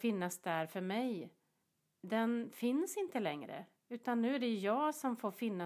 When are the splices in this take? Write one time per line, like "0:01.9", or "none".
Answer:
none

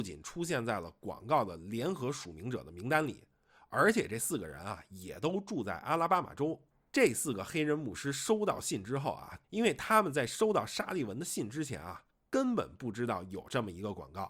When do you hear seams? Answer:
0:06.9
0:09.4

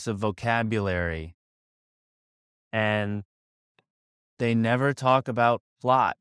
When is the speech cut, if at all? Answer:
none

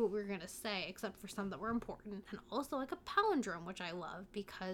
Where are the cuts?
0:02.3

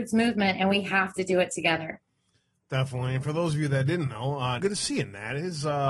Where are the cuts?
0:04.6

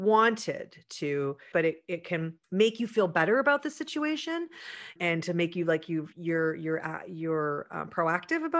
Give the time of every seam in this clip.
0:01.5

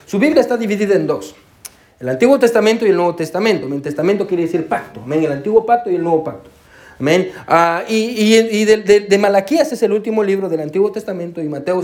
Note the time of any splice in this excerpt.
none

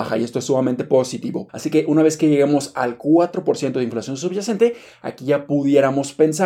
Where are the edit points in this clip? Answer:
0:01.5

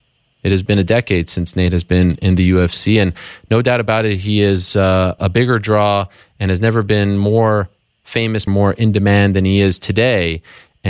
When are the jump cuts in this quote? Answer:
0:05.2
0:08.5

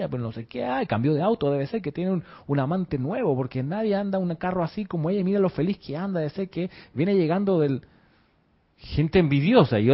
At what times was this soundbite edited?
none

